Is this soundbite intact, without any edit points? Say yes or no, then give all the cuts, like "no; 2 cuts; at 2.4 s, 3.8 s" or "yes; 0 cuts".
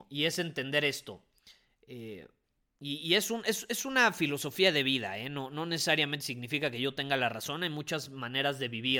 yes; 0 cuts